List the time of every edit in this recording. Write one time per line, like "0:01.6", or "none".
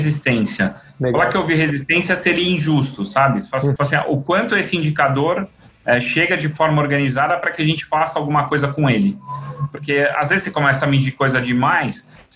0:03.8